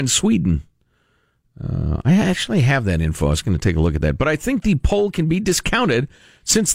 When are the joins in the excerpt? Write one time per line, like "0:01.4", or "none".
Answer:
none